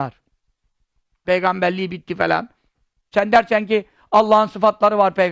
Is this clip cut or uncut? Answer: cut